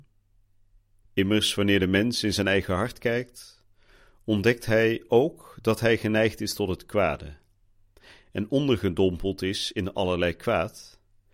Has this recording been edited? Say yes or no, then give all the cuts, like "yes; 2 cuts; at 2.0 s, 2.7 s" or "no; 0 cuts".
yes; 1 cut; at 1.0 s